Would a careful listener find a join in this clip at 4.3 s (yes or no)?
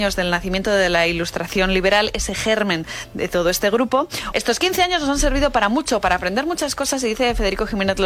yes